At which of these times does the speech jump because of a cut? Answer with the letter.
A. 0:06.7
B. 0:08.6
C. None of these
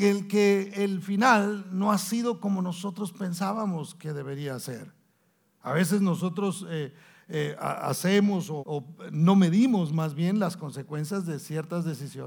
B